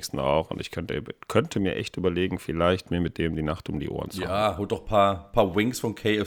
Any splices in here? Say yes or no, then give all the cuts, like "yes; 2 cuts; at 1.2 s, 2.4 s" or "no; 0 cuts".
no; 0 cuts